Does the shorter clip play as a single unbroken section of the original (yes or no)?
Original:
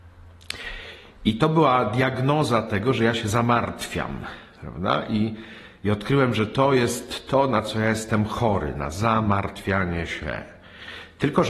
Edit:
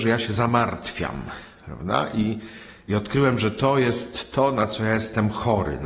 yes